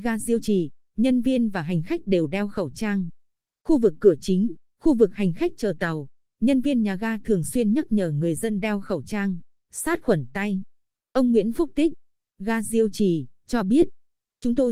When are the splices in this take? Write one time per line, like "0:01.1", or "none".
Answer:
0:12.3